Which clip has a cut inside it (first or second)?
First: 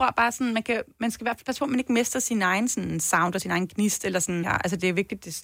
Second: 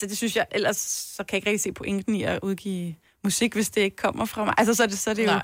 first